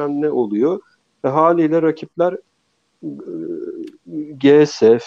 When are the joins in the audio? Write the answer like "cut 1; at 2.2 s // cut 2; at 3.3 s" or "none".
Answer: none